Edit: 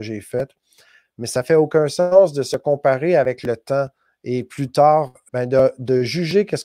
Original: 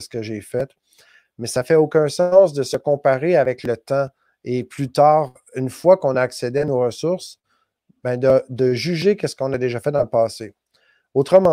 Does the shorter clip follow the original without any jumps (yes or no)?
no